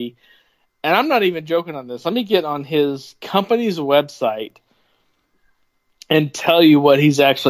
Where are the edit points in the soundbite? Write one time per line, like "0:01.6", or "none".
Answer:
none